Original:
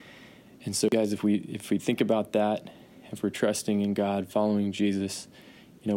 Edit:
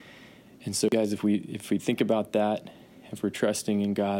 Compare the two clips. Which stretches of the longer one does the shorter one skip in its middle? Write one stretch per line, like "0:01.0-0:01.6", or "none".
none